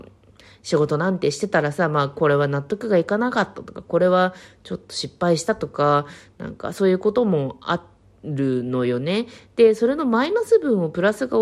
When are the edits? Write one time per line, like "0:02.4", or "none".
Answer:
none